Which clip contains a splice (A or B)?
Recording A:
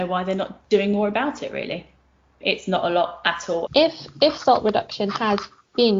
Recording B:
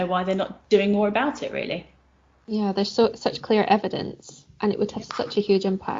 A